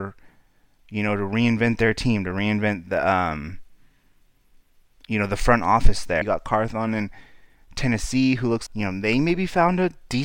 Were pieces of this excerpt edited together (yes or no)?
yes